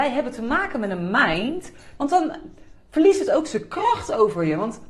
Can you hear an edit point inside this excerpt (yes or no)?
yes